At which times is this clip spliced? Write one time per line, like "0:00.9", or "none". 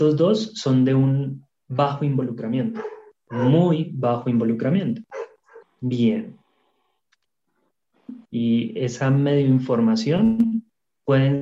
0:05.6
0:08.3